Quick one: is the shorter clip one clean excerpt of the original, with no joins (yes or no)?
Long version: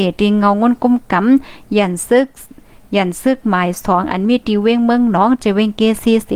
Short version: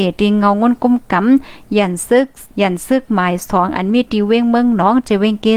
no